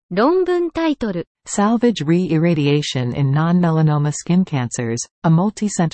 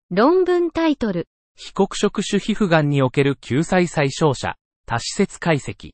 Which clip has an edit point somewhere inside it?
first; 1 cut; at 1.3 s

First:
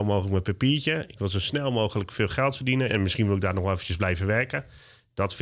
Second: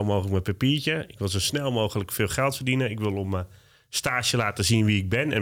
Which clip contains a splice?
first; 1 cut; at 2.9 s

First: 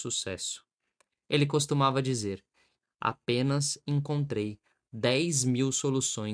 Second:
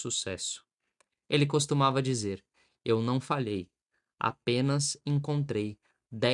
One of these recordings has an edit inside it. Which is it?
first; 1 cut; at 2.8 s

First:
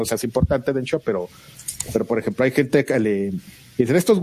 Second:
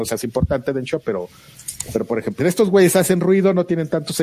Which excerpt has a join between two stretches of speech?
second; 1 cut; at 2.4 s

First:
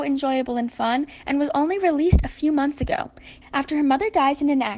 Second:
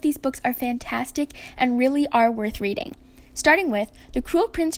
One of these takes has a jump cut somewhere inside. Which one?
first; 1 cut; at 3.4 s

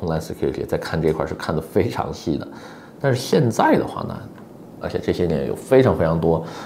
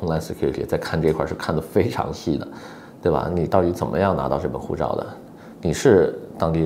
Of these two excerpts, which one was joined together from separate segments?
first; 2 cuts; at 2.9 s, 4.8 s

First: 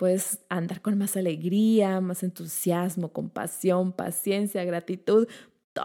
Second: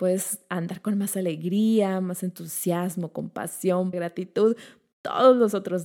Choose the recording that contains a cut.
second; 1 cut; at 3.9 s

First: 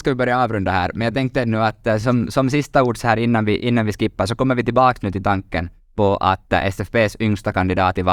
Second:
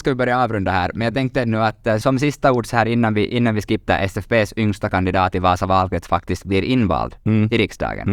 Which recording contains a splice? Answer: second; 2 cuts; at 2.0 s, 3.9 s

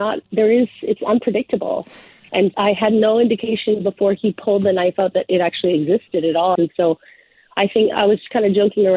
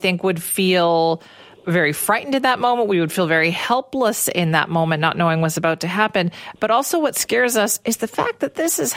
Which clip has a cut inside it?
first; 2 cuts; at 2.5 s, 6.6 s

